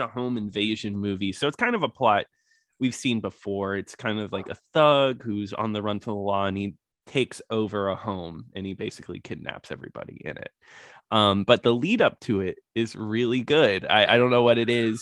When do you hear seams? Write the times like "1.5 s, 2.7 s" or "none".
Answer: none

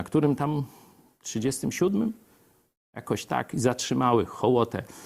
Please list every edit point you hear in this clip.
none

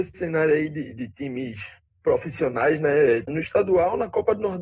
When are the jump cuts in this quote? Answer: 3.3 s

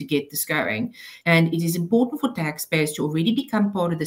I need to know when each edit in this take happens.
1.2 s

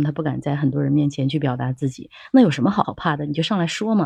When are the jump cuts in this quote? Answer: none

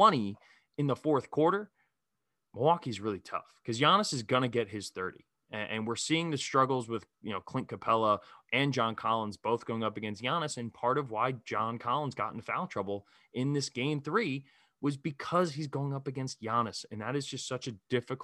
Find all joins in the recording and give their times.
none

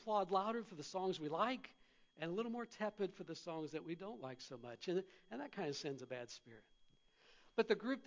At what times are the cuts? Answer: none

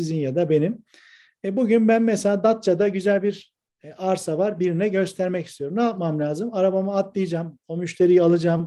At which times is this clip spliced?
none

